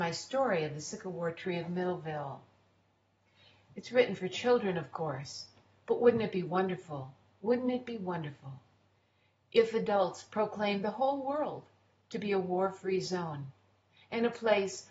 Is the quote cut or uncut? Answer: uncut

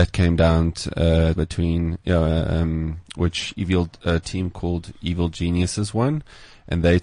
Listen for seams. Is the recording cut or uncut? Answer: cut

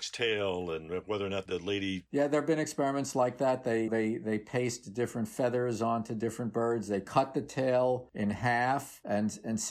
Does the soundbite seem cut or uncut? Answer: cut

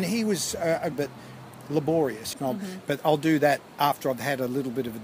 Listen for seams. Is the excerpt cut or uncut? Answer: cut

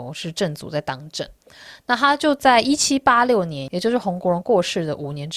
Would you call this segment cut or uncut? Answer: uncut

